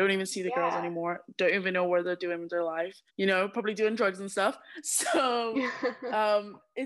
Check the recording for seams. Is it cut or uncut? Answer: cut